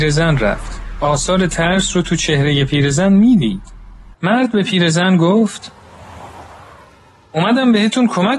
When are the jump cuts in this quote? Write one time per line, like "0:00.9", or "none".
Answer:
0:04.1